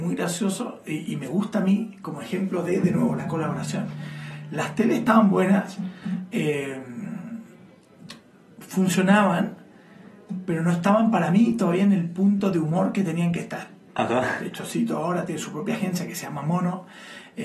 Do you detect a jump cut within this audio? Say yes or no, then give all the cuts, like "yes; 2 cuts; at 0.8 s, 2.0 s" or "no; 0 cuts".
yes; 1 cut; at 13.9 s